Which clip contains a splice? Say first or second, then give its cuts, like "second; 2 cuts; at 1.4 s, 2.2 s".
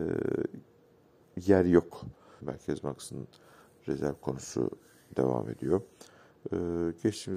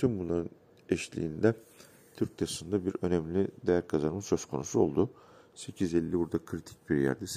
first; 1 cut; at 2.4 s